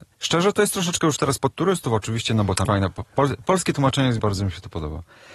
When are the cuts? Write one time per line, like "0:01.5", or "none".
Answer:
0:02.7
0:04.2